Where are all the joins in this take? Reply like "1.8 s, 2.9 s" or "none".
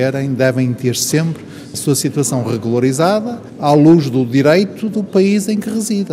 none